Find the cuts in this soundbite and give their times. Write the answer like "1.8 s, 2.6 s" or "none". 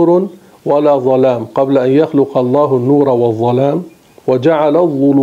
4.2 s